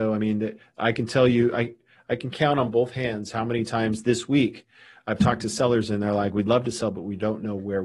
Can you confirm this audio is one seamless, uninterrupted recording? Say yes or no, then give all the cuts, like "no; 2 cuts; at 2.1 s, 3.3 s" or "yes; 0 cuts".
yes; 0 cuts